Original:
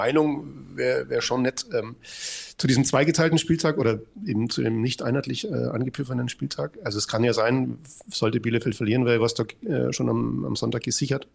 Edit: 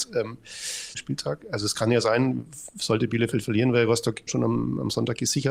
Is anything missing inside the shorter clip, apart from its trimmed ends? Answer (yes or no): yes